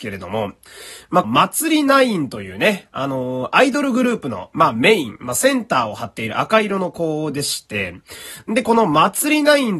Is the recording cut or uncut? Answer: cut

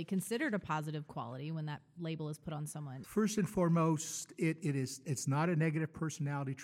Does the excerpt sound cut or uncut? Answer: cut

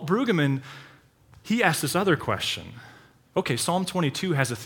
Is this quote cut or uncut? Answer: uncut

